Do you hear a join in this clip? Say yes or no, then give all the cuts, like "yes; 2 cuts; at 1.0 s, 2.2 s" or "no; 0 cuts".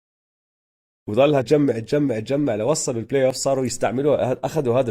yes; 1 cut; at 1.4 s